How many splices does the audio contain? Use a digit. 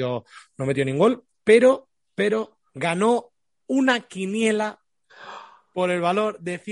1